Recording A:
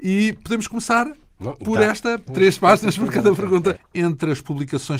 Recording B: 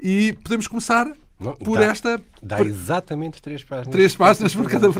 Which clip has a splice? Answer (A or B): A